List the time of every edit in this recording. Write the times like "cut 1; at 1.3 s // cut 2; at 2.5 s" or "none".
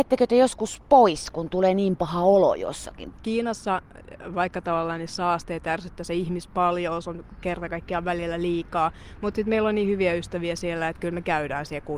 cut 1; at 3.2 s